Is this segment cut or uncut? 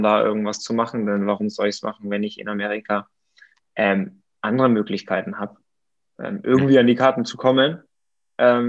uncut